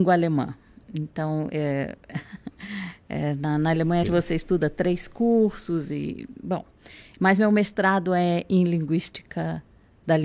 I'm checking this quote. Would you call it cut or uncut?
cut